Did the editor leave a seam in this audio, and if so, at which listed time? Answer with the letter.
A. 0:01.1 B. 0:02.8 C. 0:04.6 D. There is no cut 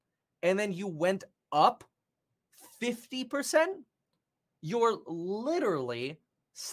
D